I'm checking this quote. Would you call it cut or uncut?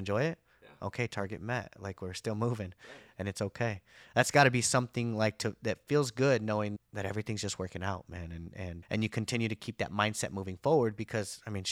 cut